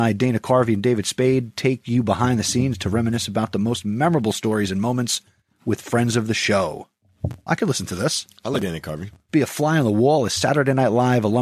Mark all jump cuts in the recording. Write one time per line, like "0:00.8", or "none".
0:07.5
0:09.3